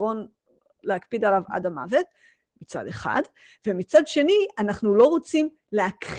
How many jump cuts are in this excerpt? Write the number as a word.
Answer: zero